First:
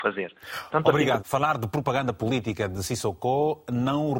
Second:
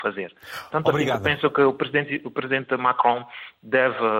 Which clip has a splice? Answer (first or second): first